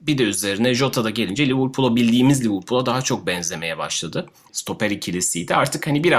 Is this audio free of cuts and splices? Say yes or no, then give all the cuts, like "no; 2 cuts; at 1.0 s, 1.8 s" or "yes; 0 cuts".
no; 1 cut; at 4.5 s